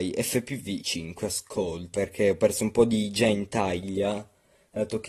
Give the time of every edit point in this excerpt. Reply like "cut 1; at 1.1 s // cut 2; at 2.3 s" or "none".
cut 1; at 1.9 s

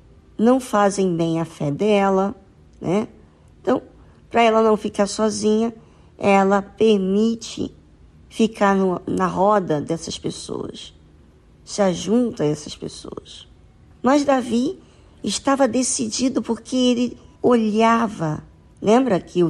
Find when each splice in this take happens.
none

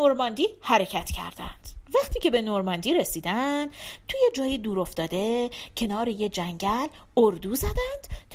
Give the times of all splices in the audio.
cut 1; at 1.8 s

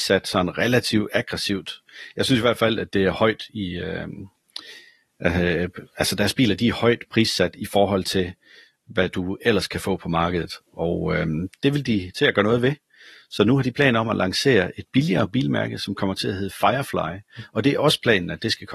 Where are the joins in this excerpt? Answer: none

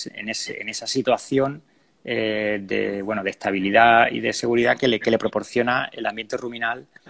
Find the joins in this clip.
none

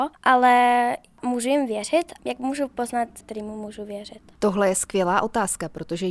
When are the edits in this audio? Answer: cut 1; at 2.2 s // cut 2; at 3.2 s

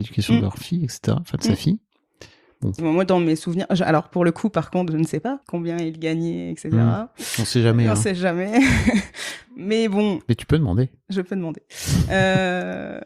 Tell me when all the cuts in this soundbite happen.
cut 1; at 2.8 s // cut 2; at 5.4 s

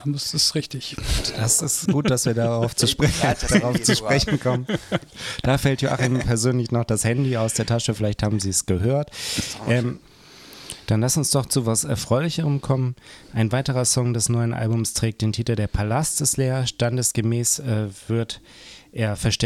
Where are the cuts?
cut 1; at 1.9 s

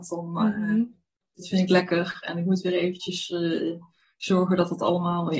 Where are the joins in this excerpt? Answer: cut 1; at 1.4 s

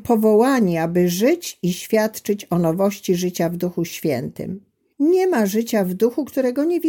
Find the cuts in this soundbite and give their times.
cut 1; at 4.9 s

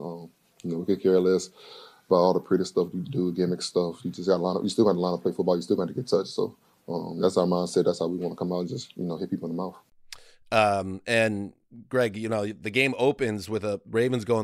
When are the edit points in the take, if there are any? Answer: none

